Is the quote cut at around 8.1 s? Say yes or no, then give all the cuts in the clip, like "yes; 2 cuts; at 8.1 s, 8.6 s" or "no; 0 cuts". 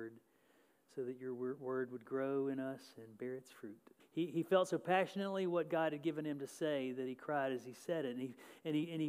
no; 1 cut; at 4.0 s